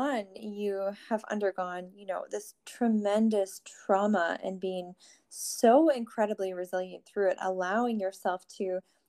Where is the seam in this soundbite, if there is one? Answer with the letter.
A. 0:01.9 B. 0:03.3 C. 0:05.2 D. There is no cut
D